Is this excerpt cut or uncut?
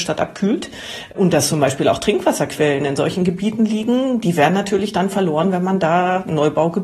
uncut